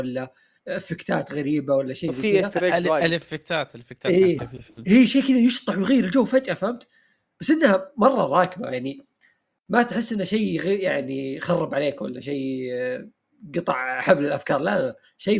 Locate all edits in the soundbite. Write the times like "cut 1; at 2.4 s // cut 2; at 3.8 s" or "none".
cut 1; at 4.4 s